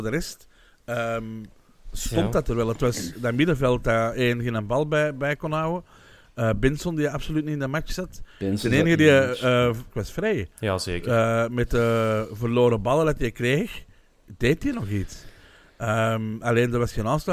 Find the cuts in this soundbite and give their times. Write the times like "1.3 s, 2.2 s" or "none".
9.9 s